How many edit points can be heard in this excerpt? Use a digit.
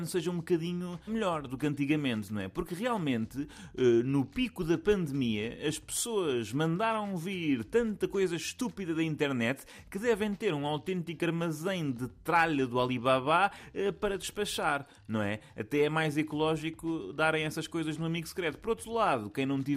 1